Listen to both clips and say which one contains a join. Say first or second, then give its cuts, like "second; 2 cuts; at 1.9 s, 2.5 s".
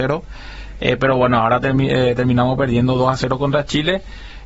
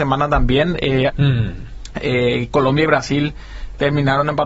second; 1 cut; at 1.1 s